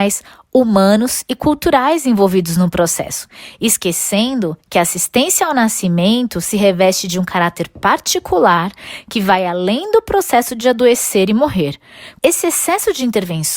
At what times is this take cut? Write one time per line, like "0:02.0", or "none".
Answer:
0:12.2